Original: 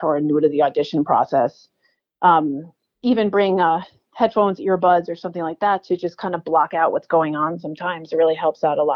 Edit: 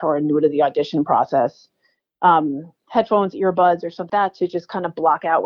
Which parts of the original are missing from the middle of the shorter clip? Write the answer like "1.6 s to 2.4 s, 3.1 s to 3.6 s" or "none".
2.8 s to 4.1 s, 5.3 s to 5.6 s